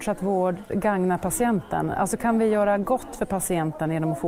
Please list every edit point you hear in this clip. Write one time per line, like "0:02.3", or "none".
none